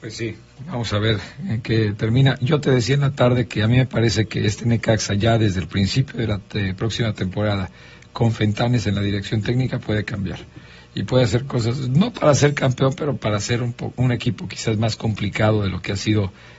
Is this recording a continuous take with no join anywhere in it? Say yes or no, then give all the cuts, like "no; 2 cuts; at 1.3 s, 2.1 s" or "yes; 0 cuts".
yes; 0 cuts